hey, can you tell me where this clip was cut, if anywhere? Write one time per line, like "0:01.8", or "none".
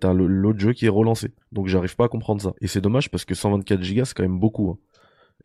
0:01.4
0:02.6